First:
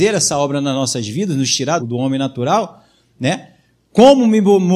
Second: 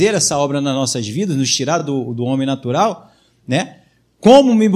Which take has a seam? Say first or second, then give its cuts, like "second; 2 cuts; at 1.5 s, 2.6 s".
first; 1 cut; at 1.8 s